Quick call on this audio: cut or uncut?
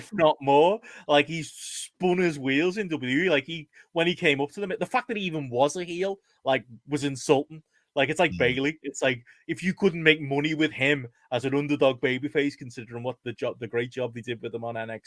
uncut